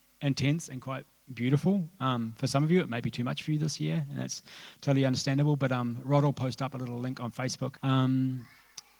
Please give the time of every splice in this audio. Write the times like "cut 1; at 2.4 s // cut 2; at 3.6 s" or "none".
cut 1; at 7.8 s